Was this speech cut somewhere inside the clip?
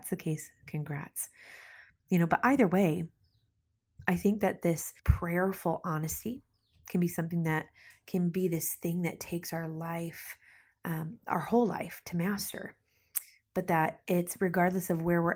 yes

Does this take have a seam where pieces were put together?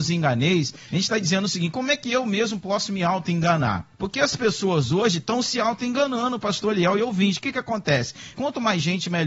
yes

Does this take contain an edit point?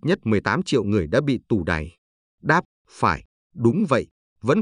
no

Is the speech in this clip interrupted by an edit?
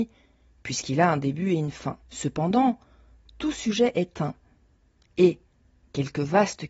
yes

